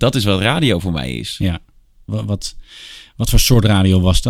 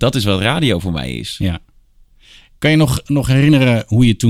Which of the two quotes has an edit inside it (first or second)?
first